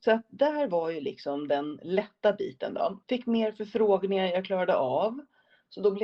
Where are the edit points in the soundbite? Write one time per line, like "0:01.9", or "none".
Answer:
0:03.0